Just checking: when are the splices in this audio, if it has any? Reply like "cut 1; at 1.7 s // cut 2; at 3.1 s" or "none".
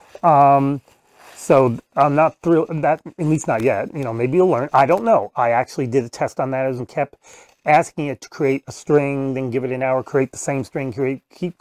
cut 1; at 6.8 s